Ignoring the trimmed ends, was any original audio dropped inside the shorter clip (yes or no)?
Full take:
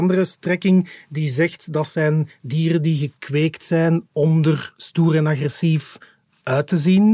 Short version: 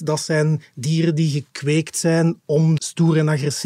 yes